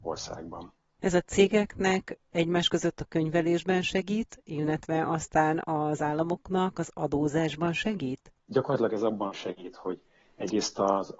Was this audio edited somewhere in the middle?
yes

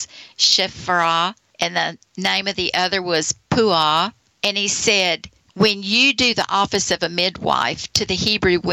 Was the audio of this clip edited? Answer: no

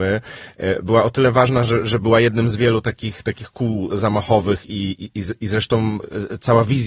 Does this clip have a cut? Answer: no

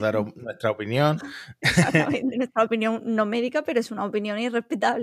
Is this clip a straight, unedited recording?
yes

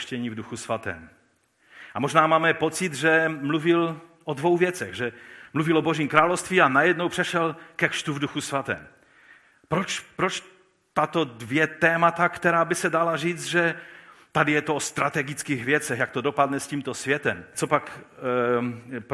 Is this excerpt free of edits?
no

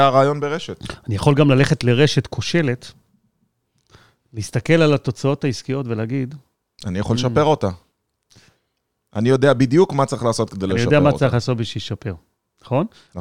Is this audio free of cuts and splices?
yes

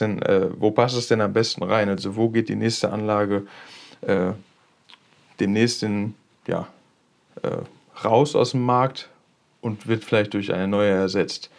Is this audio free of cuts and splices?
yes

